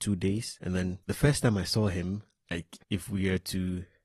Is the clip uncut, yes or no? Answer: yes